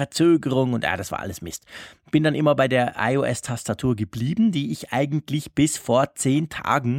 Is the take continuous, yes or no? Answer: yes